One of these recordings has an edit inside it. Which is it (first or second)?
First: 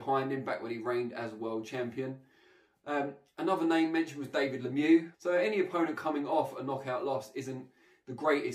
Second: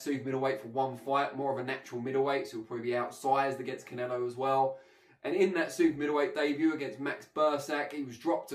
first